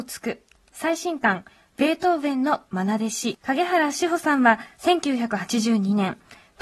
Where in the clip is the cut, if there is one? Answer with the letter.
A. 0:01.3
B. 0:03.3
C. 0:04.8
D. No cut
B